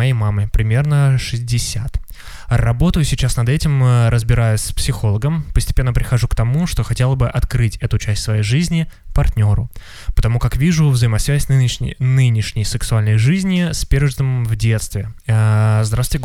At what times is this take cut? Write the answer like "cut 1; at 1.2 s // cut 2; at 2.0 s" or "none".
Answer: cut 1; at 15.2 s